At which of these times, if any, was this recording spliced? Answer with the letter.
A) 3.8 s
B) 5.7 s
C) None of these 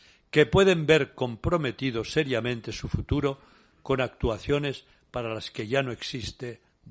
C